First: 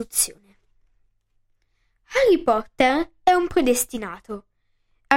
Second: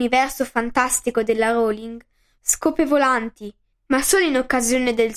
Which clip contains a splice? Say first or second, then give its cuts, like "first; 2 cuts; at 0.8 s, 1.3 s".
second; 2 cuts; at 2.4 s, 3.7 s